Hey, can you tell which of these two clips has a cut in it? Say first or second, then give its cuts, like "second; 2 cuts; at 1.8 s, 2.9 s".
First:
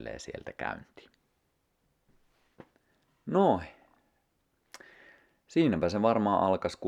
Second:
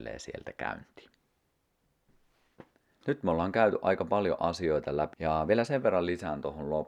second; 2 cuts; at 3.0 s, 5.1 s